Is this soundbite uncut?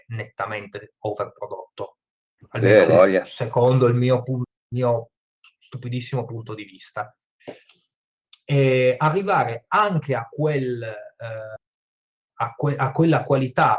yes; 0 cuts

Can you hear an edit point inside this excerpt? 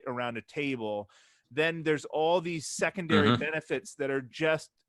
no; 0 cuts

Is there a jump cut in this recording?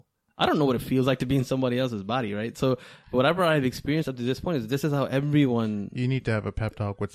no; 0 cuts

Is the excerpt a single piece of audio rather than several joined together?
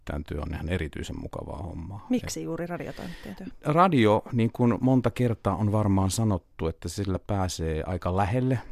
yes; 0 cuts

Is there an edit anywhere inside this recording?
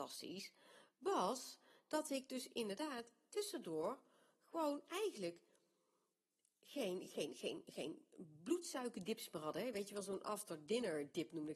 no; 0 cuts

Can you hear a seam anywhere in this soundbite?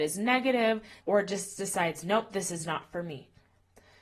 yes; 1 cut; at 1.0 s

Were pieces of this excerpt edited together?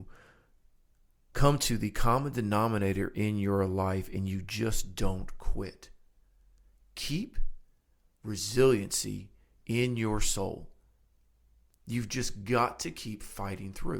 no; 0 cuts

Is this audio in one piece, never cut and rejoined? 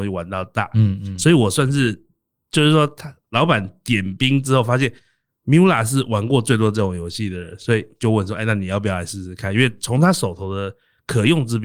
yes; 0 cuts

